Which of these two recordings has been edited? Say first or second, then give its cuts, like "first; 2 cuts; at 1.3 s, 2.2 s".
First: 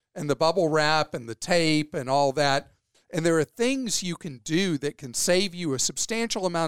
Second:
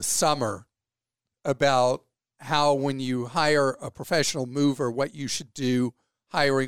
first; 1 cut; at 2.9 s